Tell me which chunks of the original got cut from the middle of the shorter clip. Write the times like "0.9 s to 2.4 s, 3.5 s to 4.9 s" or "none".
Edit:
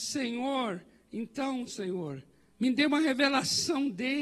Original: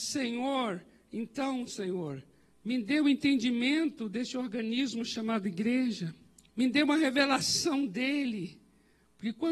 2.5 s to 6.5 s